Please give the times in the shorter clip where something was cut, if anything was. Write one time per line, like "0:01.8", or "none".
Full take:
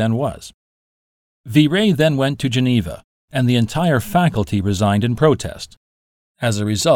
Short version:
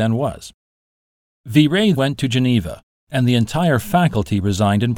0:02.0